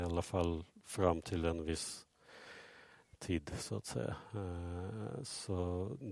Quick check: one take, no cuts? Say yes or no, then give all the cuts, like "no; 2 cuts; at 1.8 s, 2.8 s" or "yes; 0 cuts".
no; 1 cut; at 3.1 s